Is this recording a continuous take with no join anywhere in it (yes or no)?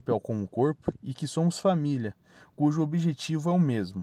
yes